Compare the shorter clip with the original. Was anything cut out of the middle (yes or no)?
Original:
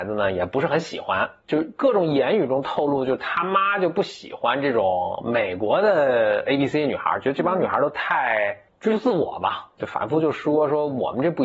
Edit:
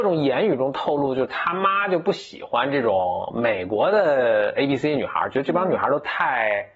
no